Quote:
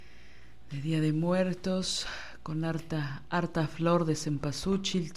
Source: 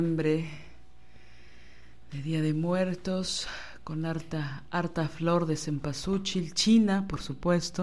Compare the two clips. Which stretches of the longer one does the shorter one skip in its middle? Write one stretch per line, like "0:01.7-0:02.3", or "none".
none